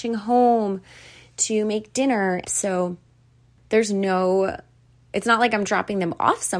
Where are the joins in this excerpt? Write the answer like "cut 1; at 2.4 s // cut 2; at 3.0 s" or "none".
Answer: cut 1; at 2.5 s